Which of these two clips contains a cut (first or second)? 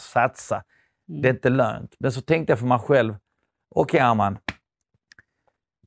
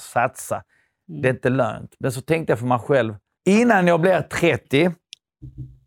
second